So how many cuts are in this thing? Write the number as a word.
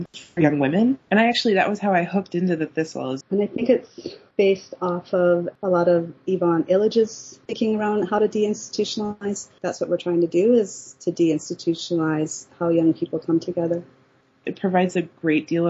three